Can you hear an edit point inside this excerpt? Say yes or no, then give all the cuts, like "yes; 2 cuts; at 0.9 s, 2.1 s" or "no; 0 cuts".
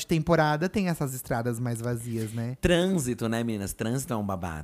no; 0 cuts